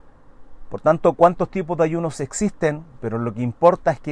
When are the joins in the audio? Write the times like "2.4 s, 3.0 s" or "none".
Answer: 3.0 s